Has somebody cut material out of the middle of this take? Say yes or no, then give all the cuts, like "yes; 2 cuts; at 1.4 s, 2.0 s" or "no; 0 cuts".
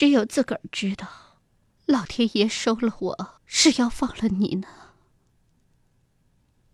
yes; 2 cuts; at 1.8 s, 3.4 s